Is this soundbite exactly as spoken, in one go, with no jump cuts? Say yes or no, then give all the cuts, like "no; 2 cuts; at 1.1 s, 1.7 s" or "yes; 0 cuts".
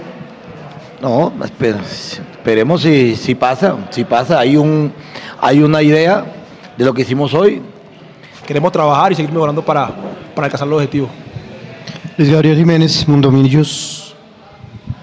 no; 1 cut; at 8.4 s